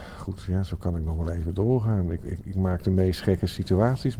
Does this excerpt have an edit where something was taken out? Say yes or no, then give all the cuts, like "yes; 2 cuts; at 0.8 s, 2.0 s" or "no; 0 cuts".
yes; 1 cut; at 2.4 s